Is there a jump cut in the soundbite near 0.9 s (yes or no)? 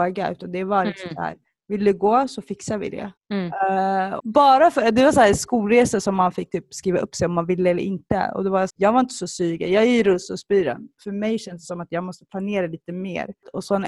no